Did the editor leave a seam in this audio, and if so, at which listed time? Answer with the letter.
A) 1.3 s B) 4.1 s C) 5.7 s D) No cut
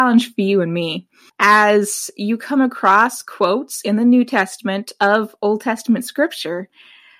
A